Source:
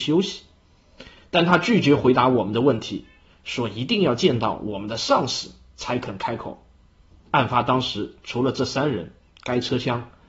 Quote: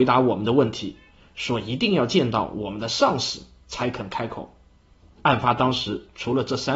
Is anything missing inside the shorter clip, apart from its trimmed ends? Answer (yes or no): no